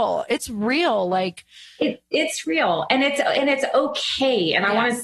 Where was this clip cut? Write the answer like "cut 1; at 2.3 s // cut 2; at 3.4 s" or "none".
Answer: none